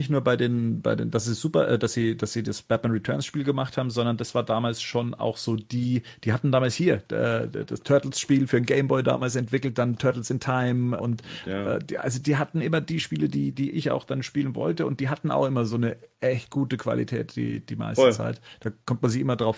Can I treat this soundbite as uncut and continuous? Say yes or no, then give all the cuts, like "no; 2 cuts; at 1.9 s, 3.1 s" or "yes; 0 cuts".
no; 1 cut; at 11.0 s